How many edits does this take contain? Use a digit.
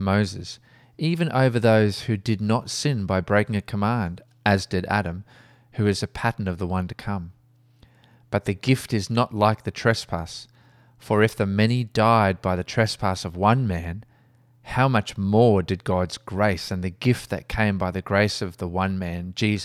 0